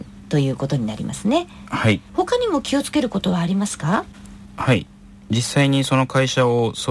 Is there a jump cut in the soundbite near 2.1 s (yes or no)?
yes